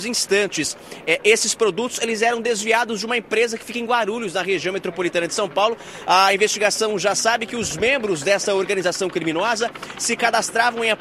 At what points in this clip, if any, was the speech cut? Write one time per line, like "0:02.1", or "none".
none